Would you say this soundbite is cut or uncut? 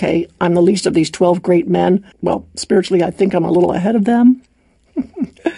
cut